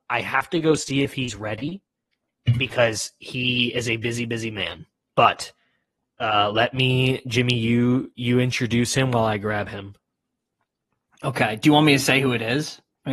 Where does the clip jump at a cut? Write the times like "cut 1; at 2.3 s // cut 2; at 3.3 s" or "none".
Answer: none